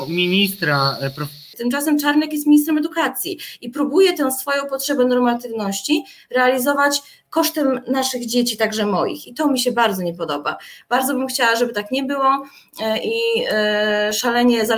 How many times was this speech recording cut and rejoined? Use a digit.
1